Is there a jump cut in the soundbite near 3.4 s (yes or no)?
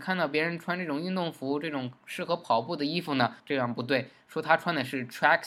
yes